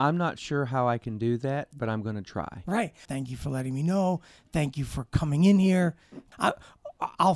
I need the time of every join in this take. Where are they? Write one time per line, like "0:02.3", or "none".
0:03.1
0:06.3